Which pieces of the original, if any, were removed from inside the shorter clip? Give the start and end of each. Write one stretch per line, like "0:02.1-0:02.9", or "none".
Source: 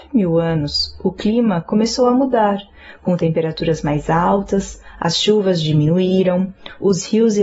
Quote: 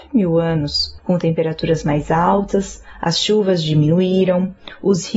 0:01.0-0:03.0